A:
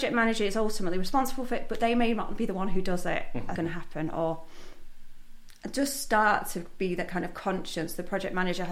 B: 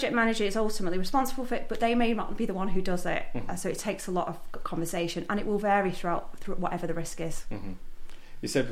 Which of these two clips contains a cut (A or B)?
A